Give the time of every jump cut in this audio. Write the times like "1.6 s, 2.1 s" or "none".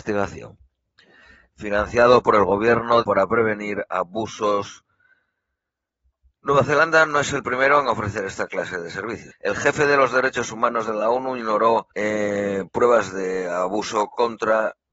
3.0 s, 9.3 s, 11.9 s